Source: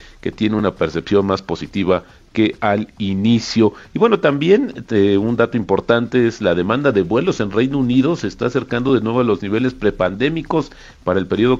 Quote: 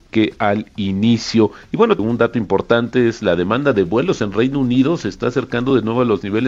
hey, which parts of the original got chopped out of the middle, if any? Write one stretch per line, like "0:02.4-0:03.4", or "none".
0:04.2-0:05.2